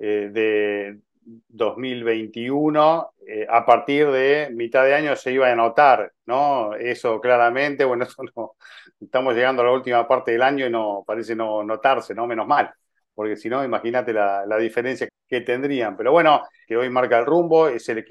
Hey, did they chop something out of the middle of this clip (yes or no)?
yes